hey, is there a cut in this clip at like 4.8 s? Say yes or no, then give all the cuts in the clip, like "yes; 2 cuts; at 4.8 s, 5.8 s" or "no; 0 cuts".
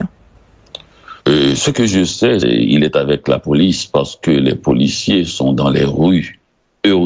no; 2 cuts; at 1.2 s, 2.4 s